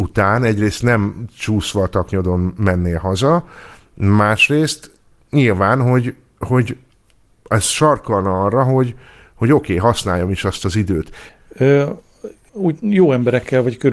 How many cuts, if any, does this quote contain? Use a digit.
2